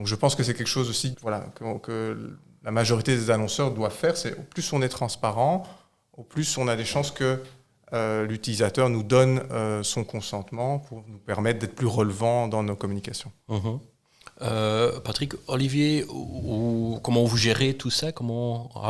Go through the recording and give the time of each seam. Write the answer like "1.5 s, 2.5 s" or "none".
1.1 s

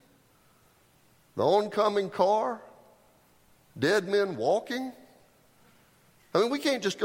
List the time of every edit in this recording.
none

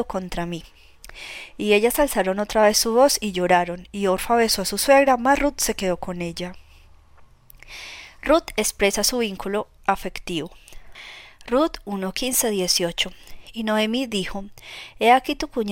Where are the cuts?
none

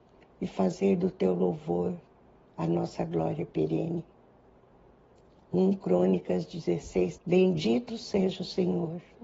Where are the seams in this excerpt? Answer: 7.2 s

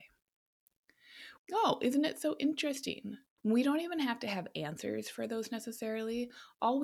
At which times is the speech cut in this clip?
1.4 s, 3.4 s

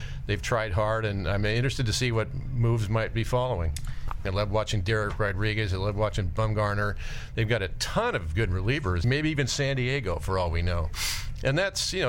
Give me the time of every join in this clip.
4.2 s, 9.0 s

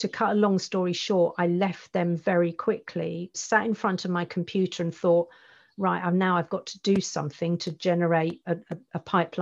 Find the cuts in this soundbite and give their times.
3.3 s, 8.4 s

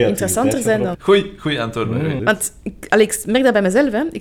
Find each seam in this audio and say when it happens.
0.9 s, 2.2 s

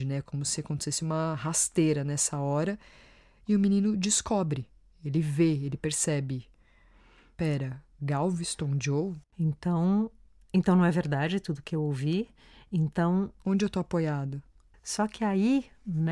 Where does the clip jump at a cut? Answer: 9.2 s, 14.7 s

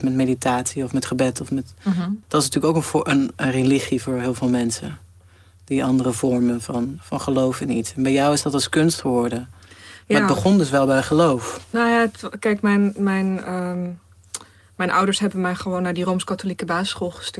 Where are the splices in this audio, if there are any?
2.2 s

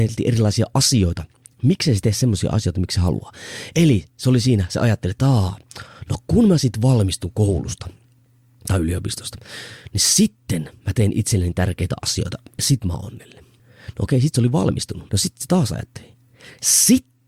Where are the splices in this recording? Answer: 13.6 s, 15.1 s

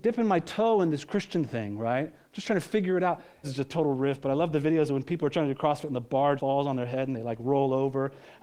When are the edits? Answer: 3.4 s, 6.4 s

